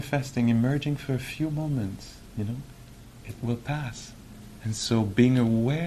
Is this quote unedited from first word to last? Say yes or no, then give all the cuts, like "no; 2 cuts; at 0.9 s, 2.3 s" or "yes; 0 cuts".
yes; 0 cuts